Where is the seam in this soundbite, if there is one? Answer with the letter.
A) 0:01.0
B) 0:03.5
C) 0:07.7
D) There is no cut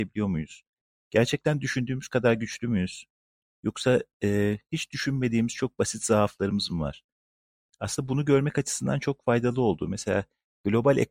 D